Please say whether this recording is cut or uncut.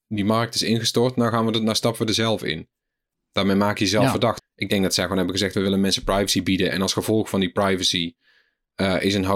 cut